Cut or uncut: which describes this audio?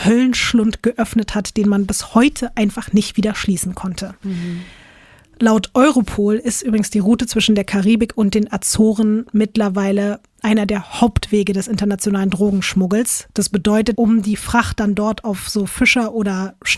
cut